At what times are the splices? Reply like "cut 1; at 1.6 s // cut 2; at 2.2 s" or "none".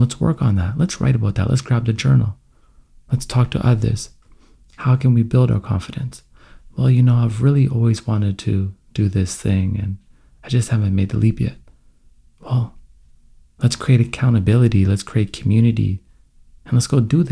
none